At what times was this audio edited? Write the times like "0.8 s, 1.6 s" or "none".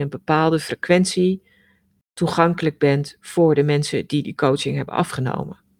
none